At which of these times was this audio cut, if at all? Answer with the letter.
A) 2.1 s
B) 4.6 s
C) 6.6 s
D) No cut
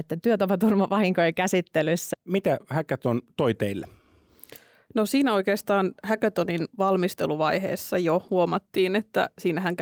A